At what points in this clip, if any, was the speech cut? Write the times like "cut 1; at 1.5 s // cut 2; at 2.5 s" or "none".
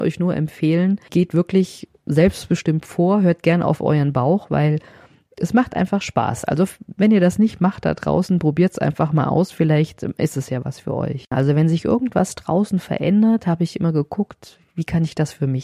cut 1; at 11.3 s